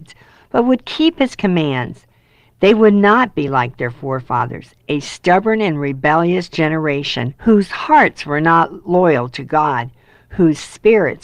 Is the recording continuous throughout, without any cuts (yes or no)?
yes